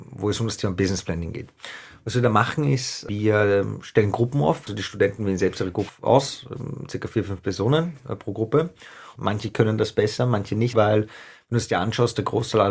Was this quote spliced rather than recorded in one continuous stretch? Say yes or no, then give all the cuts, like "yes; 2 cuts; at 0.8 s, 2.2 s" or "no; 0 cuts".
yes; 3 cuts; at 4.7 s, 9.2 s, 10.7 s